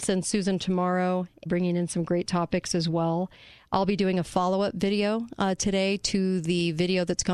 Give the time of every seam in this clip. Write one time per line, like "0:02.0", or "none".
0:01.5